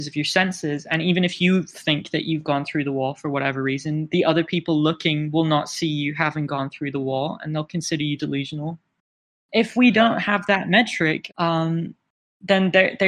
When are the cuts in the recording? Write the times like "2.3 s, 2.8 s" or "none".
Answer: 9.3 s, 11.3 s